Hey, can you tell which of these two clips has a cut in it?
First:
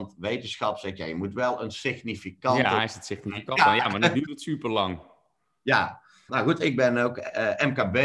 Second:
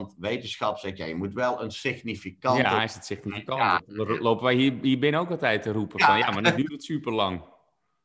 first; 2 cuts; at 3.6 s, 6.3 s

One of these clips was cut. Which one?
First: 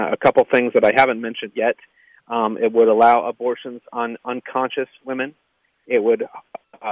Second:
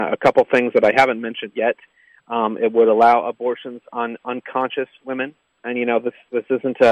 second; 1 cut; at 5.6 s

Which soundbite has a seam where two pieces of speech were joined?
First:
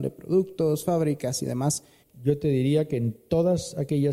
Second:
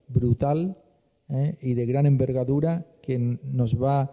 first; 1 cut; at 2.0 s

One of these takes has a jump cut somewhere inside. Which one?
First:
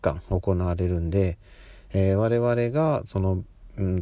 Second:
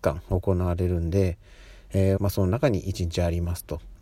second; 1 cut; at 2.2 s

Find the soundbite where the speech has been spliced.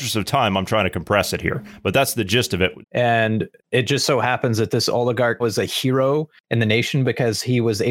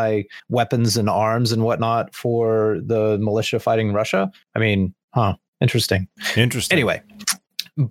first; 2 cuts; at 2.8 s, 5.4 s

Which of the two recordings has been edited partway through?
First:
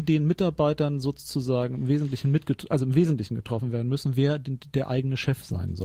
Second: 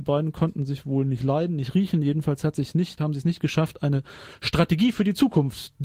second; 1 cut; at 3.0 s

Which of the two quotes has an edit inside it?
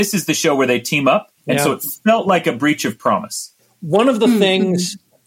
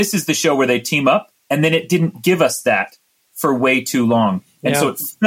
first; 1 cut; at 1.4 s

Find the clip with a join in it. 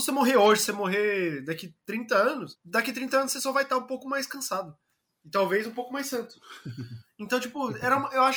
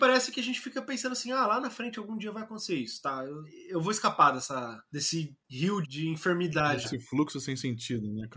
second; 2 cuts; at 5.8 s, 6.8 s

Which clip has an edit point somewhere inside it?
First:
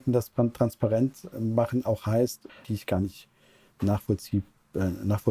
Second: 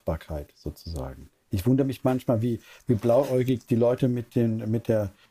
first; 2 cuts; at 1.3 s, 2.6 s

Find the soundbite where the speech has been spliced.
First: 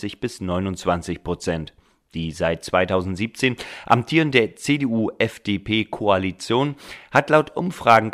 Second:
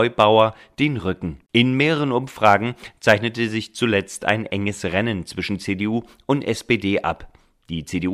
second; 1 cut; at 1.5 s

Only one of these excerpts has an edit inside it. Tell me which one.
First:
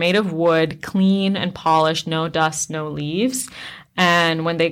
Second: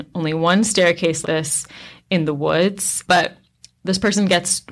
second; 2 cuts; at 1.2 s, 3.0 s

